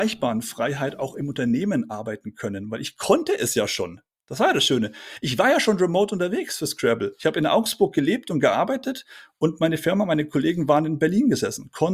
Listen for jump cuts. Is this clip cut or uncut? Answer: uncut